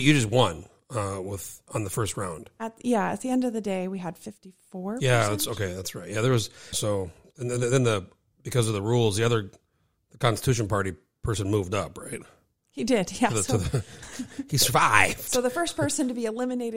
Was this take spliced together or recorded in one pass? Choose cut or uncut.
cut